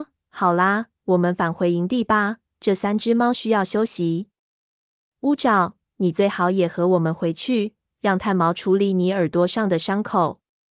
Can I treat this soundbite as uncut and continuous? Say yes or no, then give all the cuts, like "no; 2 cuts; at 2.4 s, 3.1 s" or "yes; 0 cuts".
yes; 0 cuts